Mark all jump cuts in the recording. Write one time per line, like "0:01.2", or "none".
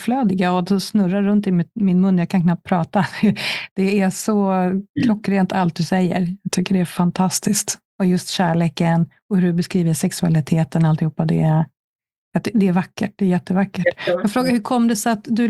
none